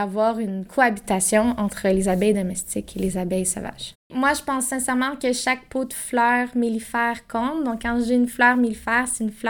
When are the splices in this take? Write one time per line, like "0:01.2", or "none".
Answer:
none

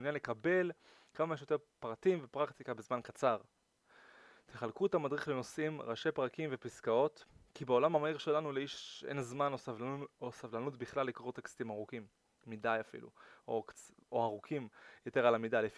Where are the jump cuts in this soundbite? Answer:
none

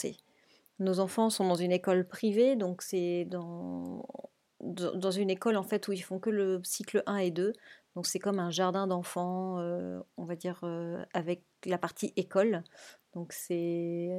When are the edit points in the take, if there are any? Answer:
none

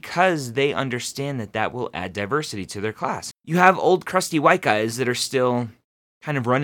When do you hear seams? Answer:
0:03.3

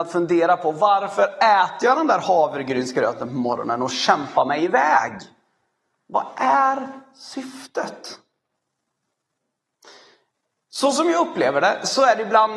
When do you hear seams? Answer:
none

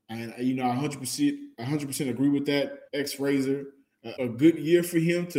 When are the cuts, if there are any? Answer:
0:02.9
0:04.2

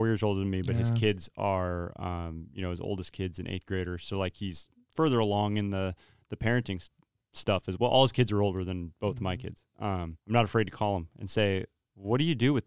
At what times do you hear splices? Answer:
0:10.2

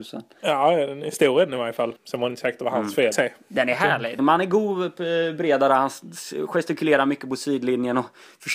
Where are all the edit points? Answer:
0:02.0
0:03.1
0:04.2

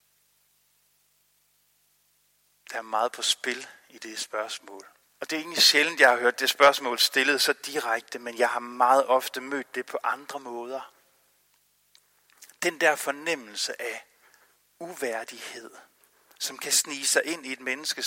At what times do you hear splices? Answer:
0:05.1

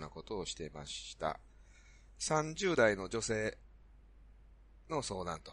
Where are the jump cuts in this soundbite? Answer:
0:02.2

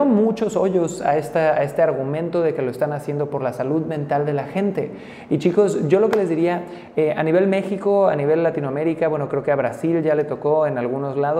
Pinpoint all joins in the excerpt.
none

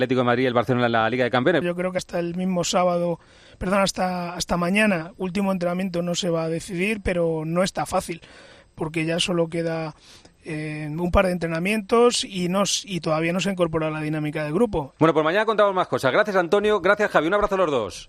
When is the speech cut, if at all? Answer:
0:01.6
0:15.0

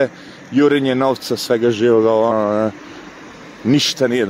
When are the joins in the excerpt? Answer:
0:02.3

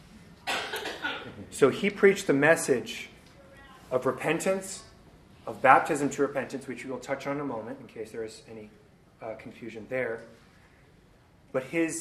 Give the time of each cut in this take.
none

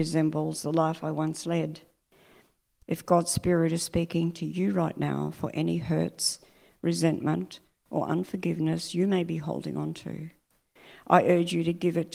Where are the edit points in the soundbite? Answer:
0:02.8

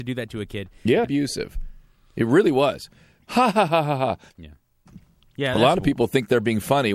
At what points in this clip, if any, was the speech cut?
0:01.0

